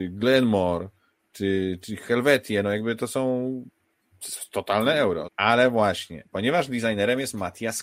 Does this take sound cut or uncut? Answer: cut